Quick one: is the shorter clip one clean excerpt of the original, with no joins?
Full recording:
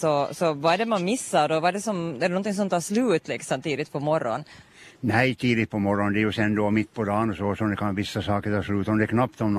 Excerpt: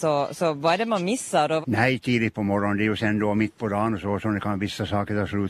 no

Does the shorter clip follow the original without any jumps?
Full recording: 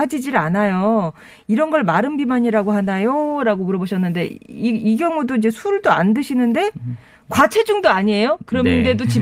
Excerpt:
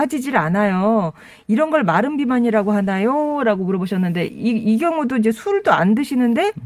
no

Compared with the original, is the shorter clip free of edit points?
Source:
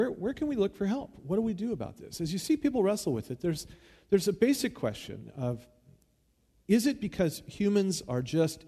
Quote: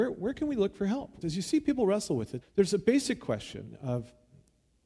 no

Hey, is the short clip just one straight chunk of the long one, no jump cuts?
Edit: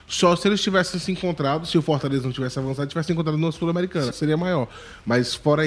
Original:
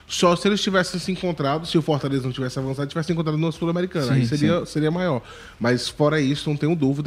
no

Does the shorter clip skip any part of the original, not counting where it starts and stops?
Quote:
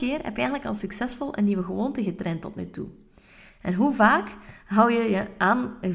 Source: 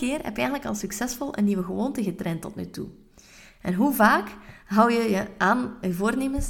no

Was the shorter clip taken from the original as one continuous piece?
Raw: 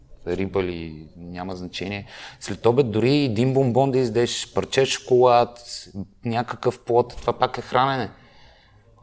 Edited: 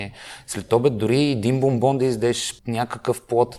no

